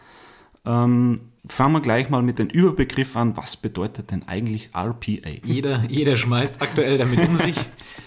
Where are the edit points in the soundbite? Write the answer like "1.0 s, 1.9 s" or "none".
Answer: 1.4 s, 5.4 s